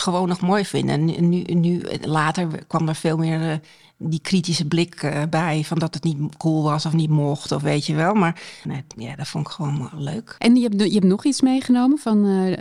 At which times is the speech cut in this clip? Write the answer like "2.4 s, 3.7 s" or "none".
8.6 s, 10.4 s